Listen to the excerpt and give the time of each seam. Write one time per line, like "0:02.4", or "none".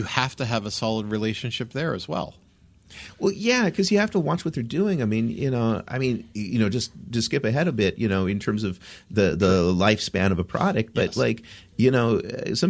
none